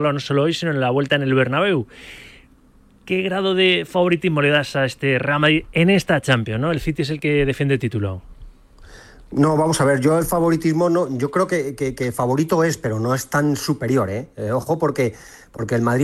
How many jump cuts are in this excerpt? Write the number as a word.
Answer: zero